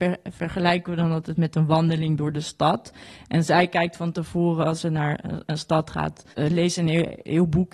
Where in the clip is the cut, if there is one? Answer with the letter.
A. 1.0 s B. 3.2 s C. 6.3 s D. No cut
C